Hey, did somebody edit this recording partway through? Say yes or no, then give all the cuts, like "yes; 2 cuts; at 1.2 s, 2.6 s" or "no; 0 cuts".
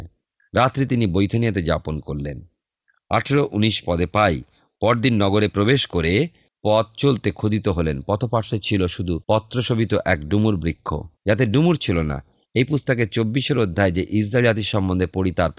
yes; 2 cuts; at 9.2 s, 11.2 s